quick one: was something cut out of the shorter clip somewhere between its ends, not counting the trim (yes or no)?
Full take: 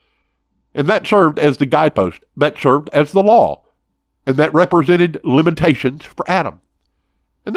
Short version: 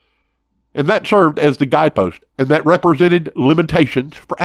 yes